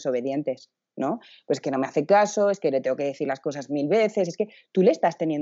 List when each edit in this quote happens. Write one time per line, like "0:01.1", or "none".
none